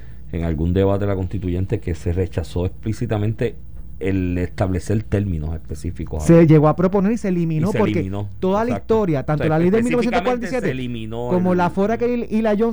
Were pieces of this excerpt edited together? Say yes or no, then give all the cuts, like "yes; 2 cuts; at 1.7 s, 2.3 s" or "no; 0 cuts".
no; 0 cuts